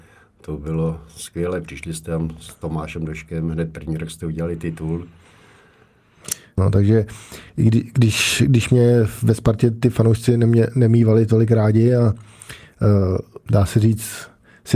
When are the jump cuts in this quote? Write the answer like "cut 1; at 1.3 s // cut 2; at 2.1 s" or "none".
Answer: cut 1; at 6.6 s // cut 2; at 13.5 s